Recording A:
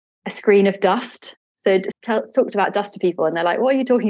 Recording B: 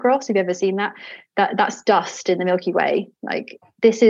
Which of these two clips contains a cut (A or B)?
A